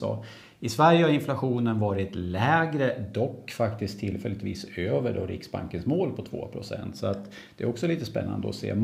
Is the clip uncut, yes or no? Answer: yes